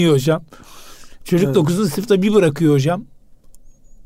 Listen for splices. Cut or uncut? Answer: uncut